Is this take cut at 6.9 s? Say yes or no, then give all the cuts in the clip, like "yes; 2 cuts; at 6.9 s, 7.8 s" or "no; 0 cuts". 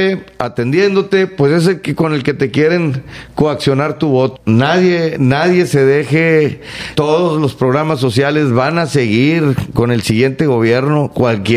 yes; 2 cuts; at 4.4 s, 6.9 s